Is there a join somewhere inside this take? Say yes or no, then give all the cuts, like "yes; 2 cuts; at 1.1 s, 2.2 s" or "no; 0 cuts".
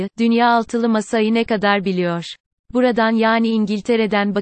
no; 0 cuts